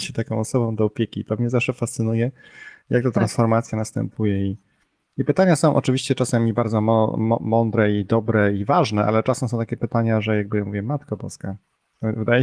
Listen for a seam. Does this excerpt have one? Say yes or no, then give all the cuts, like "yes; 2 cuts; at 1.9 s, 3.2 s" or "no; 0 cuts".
no; 0 cuts